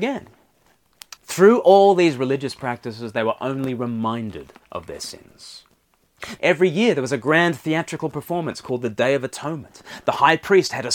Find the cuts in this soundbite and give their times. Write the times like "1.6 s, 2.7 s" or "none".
1.2 s, 6.4 s